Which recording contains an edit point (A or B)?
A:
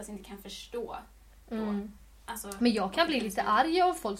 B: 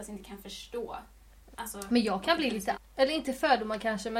B